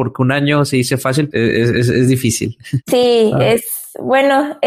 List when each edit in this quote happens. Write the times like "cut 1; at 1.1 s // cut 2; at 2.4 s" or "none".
cut 1; at 1.3 s

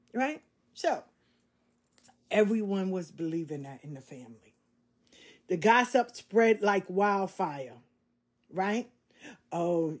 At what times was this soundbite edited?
none

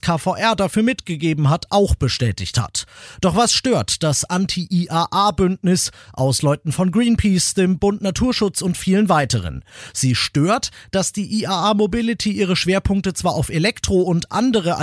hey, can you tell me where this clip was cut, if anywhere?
none

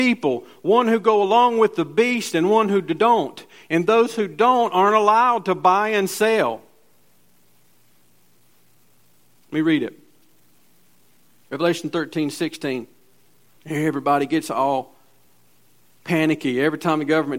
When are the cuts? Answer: cut 1; at 13.6 s

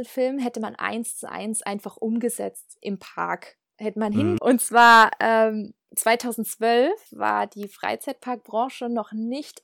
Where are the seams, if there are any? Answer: cut 1; at 4.4 s // cut 2; at 5.9 s // cut 3; at 7.1 s

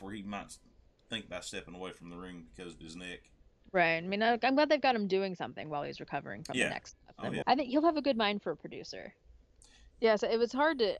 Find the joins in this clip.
cut 1; at 7.4 s // cut 2; at 9.9 s

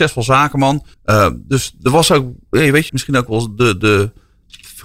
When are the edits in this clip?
cut 1; at 0.9 s // cut 2; at 2.9 s

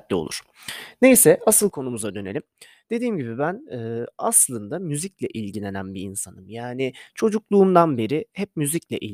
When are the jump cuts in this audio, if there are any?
none

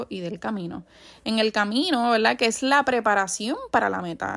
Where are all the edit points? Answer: none

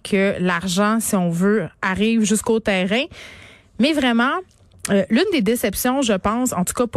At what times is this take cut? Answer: none

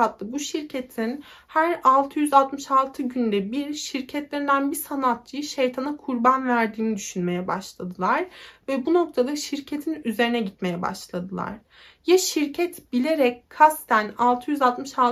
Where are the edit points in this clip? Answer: none

